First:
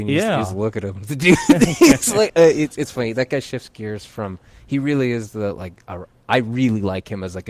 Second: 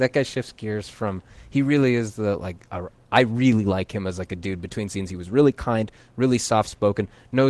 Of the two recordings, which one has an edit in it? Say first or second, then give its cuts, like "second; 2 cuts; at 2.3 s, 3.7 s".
first; 1 cut; at 2.3 s